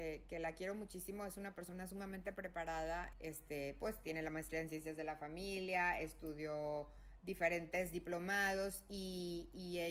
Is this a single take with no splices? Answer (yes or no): no